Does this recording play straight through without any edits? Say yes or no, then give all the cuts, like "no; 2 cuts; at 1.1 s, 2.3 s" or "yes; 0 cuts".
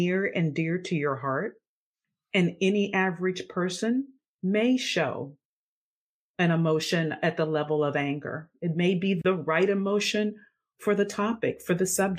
yes; 0 cuts